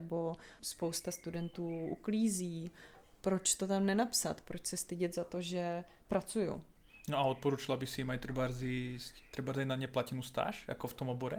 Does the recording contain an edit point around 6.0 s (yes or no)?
yes